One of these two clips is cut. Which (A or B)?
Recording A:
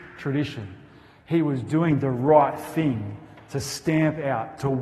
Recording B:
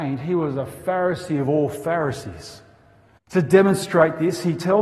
B